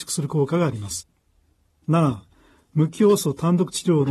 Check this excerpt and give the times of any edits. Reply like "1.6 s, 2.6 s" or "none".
1.8 s